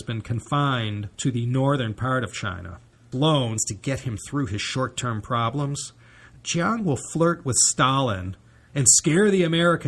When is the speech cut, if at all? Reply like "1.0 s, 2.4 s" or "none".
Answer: 1.1 s, 3.1 s